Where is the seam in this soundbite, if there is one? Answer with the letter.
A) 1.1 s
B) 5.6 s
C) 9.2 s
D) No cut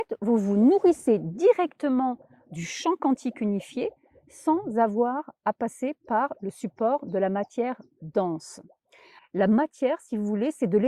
C